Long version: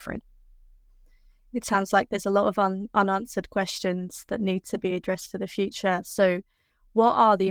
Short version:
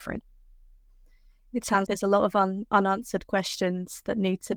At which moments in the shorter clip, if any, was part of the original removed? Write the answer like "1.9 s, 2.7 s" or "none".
1.9 s